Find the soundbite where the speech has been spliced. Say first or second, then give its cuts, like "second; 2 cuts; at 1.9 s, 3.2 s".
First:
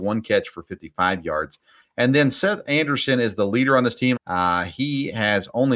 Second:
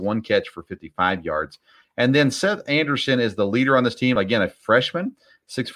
first; 1 cut; at 4.2 s